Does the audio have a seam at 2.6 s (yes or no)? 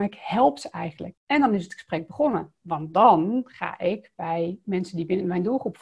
no